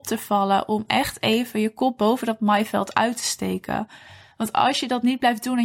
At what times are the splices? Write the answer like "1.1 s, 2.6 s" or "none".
none